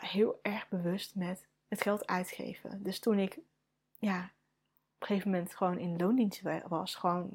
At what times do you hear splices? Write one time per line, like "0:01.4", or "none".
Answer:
none

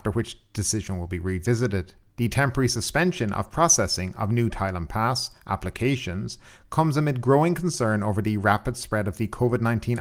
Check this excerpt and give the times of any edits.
none

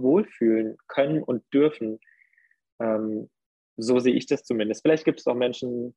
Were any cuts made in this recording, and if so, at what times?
none

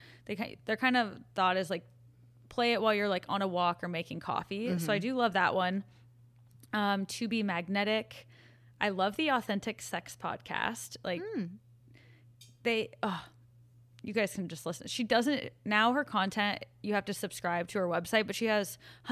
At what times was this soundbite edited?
none

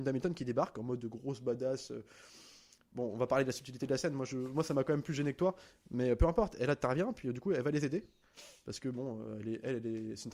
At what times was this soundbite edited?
none

